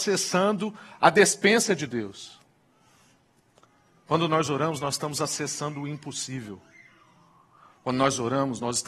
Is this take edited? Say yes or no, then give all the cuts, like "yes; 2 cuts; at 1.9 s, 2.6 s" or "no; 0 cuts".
no; 0 cuts